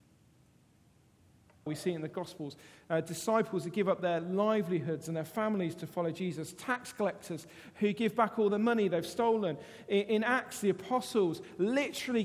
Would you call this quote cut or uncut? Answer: cut